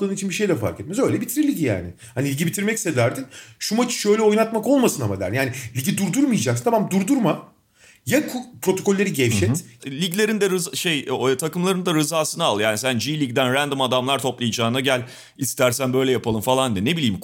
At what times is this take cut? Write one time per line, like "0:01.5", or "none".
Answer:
0:09.8